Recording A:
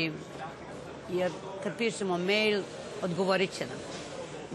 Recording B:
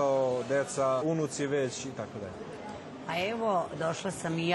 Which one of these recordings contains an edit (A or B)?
B